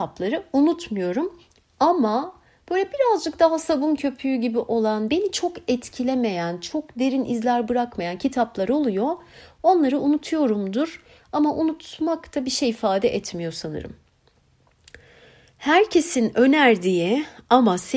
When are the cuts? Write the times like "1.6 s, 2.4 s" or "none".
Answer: 5.1 s